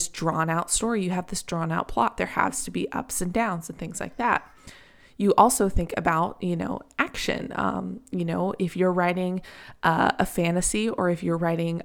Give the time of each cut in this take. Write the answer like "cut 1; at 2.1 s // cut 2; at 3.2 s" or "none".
none